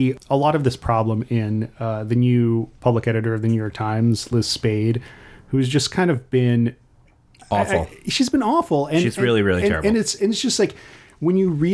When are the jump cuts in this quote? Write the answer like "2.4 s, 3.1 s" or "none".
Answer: none